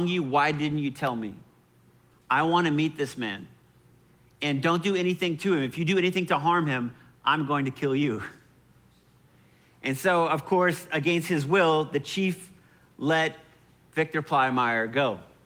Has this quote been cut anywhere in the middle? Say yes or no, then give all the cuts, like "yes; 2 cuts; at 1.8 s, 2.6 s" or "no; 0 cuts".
no; 0 cuts